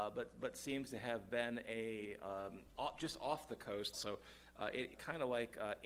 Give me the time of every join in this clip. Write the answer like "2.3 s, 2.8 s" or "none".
3.9 s, 4.9 s